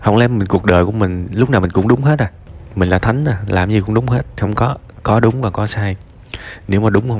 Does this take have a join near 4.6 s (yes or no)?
no